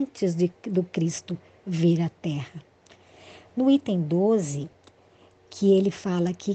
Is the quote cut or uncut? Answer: uncut